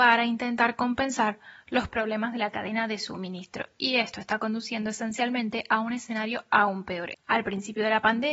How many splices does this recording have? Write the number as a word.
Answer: one